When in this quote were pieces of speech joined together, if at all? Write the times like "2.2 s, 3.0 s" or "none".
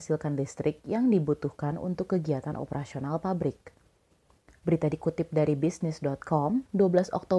4.5 s